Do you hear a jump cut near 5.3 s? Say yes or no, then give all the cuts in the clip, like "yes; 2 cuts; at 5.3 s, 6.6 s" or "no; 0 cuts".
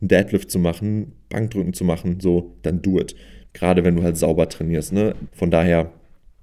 yes; 2 cuts; at 3.5 s, 5.3 s